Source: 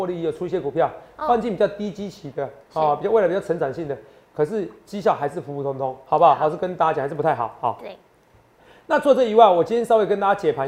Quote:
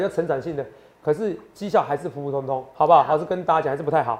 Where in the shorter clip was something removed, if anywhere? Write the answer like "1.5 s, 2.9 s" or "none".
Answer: none